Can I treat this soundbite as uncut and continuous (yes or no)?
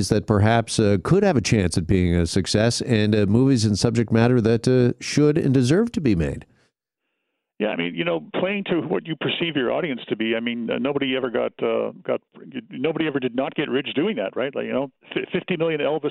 yes